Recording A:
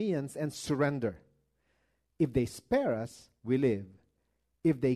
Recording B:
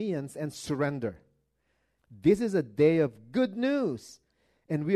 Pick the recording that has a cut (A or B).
B